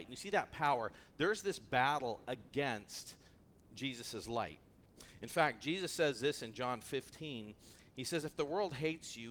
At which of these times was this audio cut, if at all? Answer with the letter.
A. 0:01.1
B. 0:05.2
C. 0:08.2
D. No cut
D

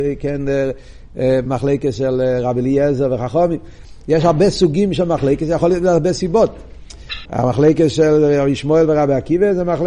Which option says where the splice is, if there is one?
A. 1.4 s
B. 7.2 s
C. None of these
B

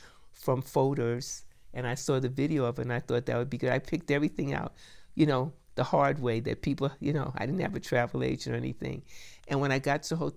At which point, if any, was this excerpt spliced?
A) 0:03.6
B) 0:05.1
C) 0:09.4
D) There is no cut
D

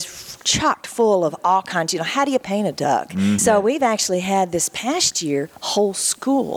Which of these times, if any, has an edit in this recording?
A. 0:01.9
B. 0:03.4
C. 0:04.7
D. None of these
B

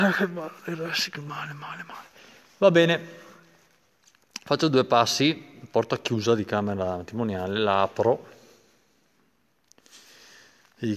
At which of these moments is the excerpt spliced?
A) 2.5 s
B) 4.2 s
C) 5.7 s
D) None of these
D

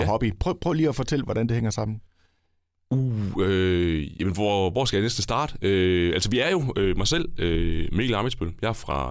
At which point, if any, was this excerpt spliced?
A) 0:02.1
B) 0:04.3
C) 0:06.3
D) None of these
D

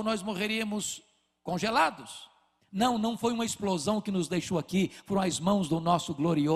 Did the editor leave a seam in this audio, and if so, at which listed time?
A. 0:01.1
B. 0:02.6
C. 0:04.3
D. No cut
B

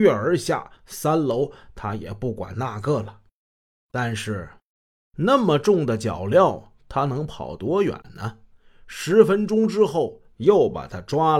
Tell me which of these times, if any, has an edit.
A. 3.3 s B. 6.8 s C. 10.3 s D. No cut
C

